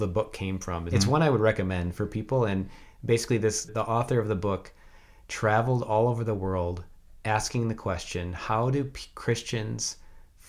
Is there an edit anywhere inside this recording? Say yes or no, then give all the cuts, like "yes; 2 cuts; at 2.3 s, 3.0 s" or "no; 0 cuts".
yes; 2 cuts; at 0.9 s, 3.7 s